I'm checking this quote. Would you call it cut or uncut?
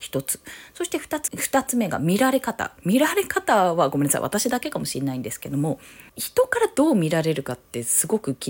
cut